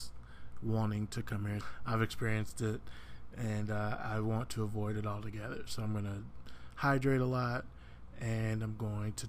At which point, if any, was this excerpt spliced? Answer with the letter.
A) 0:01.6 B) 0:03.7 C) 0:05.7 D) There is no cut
A